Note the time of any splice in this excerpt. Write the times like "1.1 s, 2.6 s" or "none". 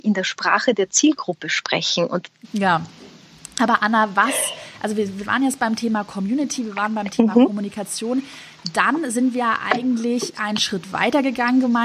2.4 s